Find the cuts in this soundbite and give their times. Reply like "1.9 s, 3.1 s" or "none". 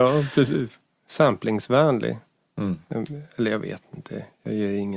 none